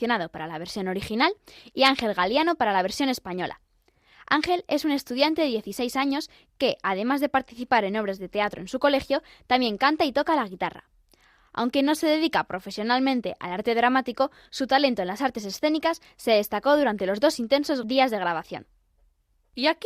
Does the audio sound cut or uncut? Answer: uncut